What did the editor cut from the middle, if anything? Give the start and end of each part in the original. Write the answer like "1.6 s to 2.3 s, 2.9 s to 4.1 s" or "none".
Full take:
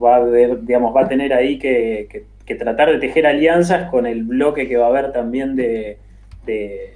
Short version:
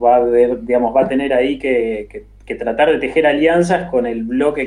none

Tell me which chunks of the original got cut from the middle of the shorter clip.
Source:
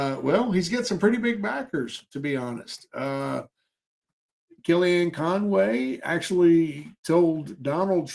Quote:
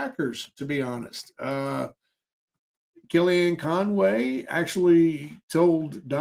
none

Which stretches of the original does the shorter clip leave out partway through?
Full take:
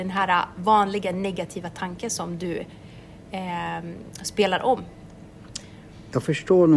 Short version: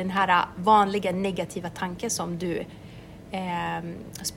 none

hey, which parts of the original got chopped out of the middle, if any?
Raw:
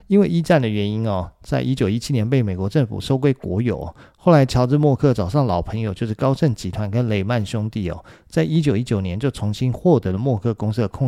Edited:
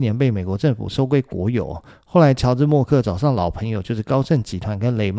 none

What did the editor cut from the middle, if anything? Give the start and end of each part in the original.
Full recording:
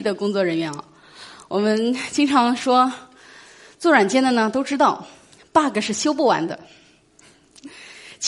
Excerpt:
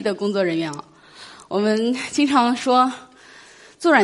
none

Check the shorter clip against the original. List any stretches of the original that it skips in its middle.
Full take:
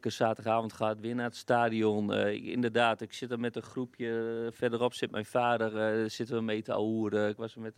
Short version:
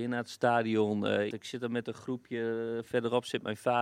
2.3 s to 3.0 s

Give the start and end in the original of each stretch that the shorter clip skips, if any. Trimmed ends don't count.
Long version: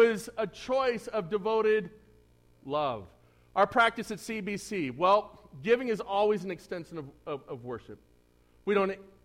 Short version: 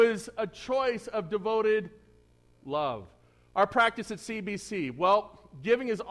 none

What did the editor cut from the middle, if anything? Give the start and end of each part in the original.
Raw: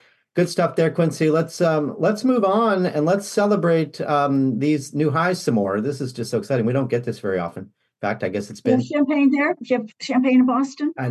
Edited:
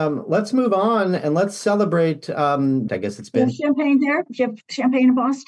4.6 s to 8.2 s

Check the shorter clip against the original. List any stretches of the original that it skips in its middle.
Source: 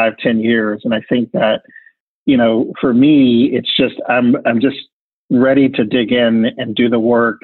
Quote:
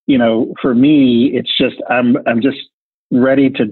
none

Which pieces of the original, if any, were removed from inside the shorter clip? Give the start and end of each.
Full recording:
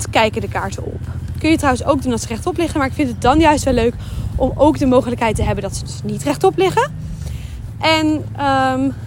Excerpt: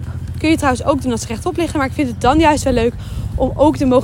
none

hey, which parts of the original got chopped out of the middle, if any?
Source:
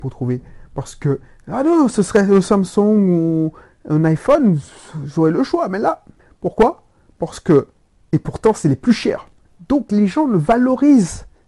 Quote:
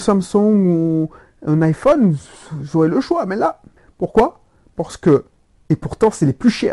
none

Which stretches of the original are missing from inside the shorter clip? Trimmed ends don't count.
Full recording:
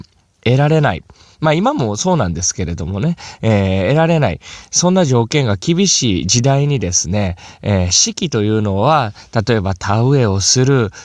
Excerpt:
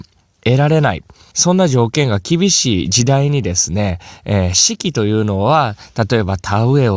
1.3 s to 4.7 s

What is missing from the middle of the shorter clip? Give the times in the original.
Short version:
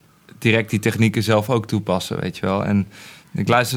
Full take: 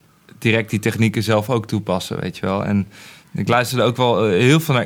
none

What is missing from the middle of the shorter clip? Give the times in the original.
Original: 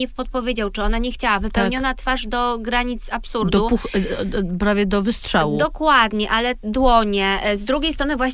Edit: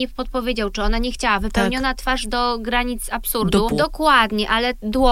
3.7 s to 5.5 s

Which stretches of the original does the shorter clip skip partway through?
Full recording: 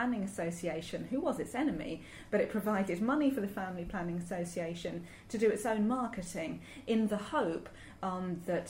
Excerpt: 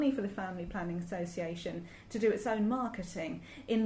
none

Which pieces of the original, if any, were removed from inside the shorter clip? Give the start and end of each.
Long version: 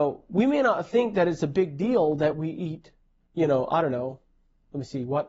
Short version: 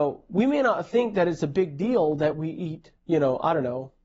3.0 s to 3.2 s

